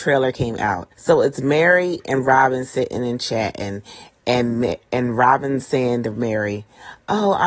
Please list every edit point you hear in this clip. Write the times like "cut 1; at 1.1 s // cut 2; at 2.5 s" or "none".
cut 1; at 0.9 s

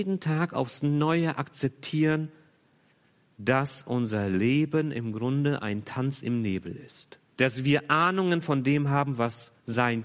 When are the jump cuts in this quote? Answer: cut 1; at 7.3 s

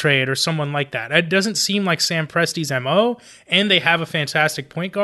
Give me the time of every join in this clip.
none

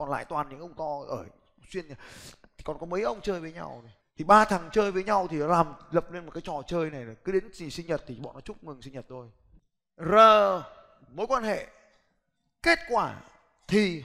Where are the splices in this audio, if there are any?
none

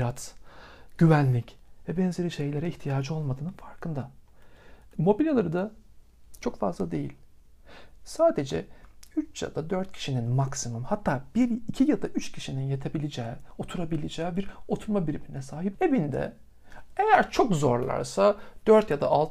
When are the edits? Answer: cut 1; at 4.9 s // cut 2; at 15.7 s

